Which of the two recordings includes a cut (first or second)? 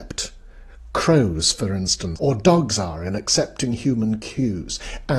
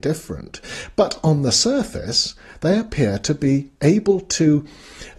first